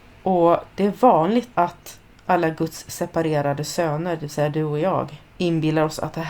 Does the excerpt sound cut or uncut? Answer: uncut